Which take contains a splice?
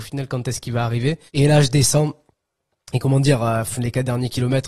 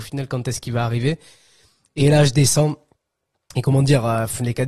first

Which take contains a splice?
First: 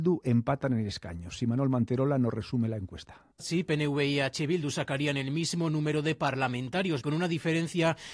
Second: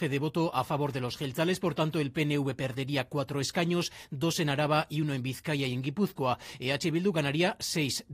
first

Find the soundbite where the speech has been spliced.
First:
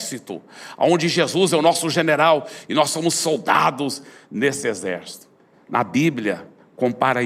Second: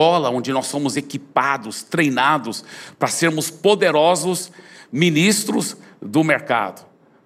first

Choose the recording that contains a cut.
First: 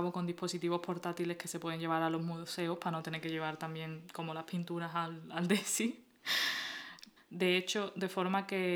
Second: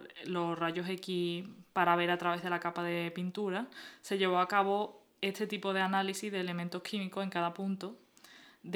first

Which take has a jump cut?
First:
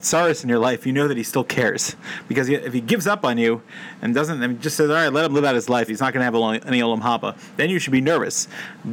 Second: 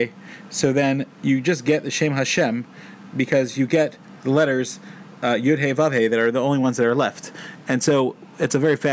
first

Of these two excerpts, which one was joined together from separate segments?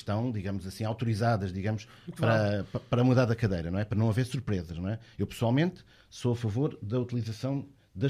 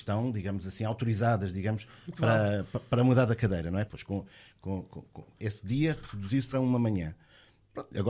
second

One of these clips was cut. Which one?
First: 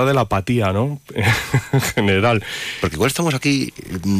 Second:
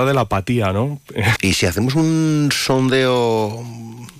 second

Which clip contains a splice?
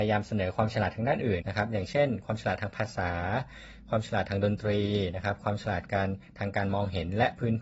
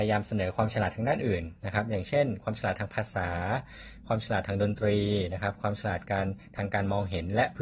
first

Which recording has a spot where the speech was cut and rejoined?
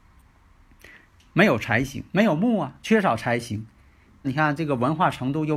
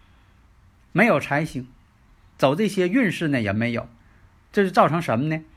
first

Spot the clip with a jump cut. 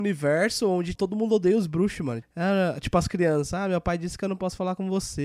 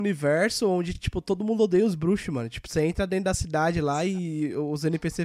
first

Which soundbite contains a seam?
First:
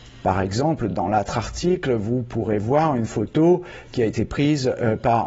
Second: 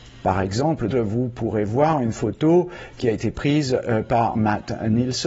second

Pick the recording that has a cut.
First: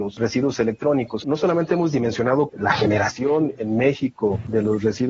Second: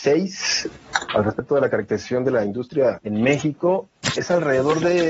first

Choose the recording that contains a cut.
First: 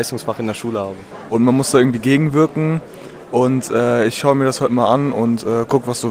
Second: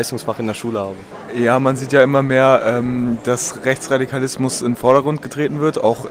first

